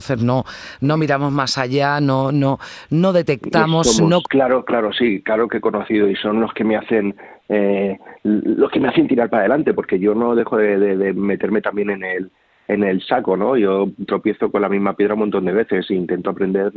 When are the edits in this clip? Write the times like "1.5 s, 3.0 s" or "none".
4.2 s